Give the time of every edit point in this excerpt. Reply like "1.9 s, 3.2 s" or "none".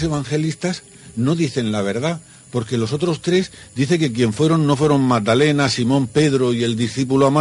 none